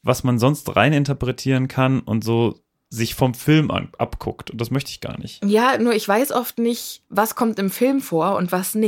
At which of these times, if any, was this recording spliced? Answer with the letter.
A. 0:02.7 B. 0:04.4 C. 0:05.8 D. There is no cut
A